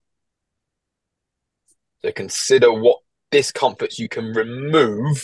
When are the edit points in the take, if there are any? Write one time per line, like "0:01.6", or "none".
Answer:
none